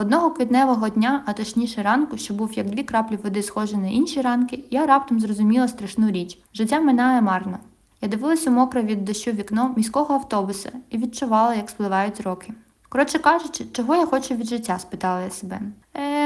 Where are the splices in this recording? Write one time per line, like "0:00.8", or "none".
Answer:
none